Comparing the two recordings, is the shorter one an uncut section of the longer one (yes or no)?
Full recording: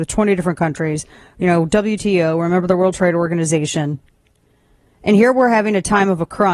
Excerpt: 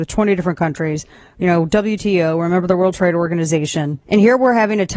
no